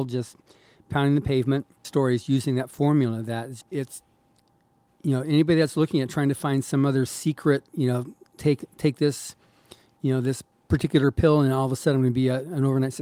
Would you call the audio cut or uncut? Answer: cut